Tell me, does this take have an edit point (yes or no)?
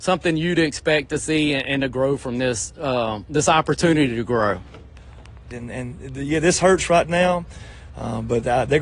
yes